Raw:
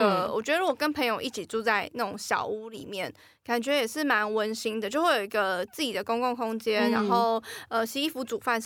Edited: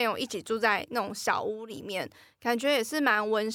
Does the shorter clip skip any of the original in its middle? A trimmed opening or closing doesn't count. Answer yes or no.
no